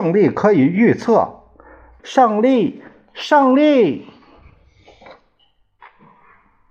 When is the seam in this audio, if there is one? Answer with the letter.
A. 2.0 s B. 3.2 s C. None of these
A